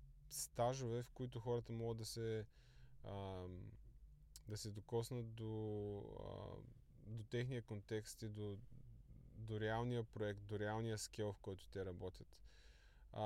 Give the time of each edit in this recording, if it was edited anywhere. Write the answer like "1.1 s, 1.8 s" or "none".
none